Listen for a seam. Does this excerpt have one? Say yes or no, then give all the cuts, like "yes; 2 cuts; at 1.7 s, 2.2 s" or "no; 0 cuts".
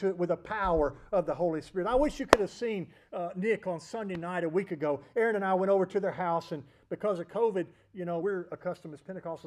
yes; 1 cut; at 8.2 s